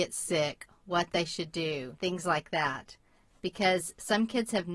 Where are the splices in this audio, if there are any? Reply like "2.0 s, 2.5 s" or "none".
2.0 s